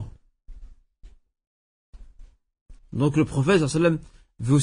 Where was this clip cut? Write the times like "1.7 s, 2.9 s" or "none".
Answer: 2.8 s